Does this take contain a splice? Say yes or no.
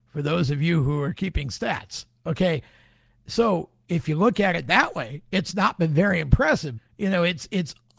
yes